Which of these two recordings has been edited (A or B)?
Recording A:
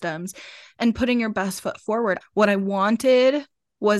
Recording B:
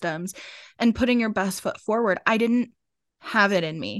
A